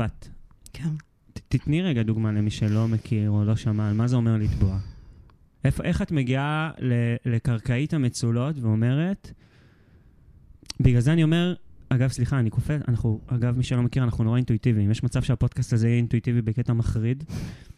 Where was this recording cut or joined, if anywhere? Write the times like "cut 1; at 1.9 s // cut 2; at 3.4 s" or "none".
none